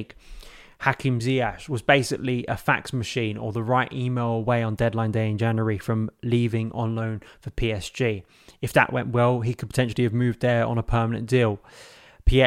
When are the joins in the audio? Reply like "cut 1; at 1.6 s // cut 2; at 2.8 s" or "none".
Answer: none